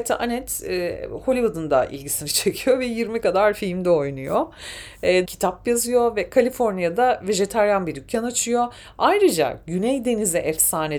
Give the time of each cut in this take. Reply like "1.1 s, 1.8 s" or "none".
5.3 s